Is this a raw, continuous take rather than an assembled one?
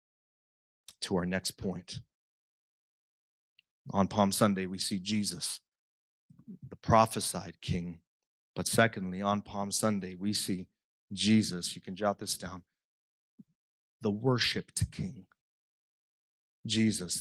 yes; 0 cuts

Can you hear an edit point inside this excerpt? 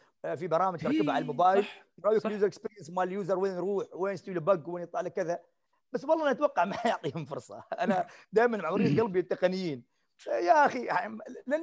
no; 0 cuts

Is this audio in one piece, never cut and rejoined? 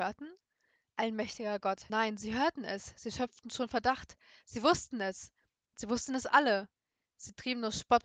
no; 1 cut; at 1.9 s

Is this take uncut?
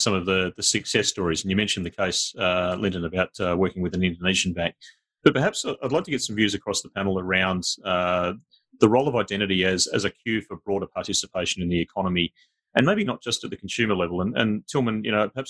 yes; 0 cuts

